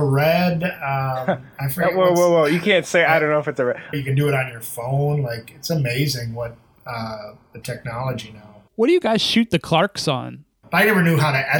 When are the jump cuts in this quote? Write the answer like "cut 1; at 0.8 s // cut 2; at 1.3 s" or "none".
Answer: cut 1; at 3.9 s // cut 2; at 8.7 s // cut 3; at 10.6 s